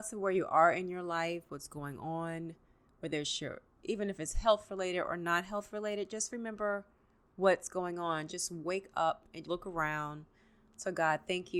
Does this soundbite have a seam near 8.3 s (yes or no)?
yes